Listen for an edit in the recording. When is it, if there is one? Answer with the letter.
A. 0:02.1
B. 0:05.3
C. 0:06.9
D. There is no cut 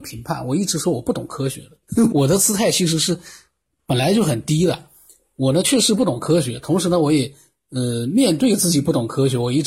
A